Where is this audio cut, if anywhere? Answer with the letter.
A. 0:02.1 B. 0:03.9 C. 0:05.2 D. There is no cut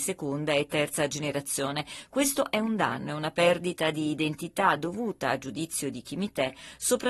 D